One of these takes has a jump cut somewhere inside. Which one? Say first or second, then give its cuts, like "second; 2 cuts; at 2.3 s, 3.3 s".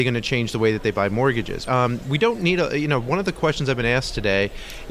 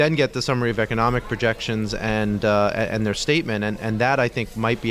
first; 1 cut; at 1.7 s